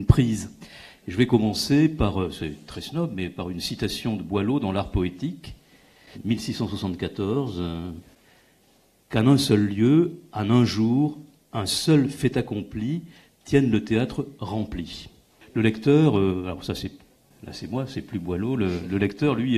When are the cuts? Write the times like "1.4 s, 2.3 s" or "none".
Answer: 15.4 s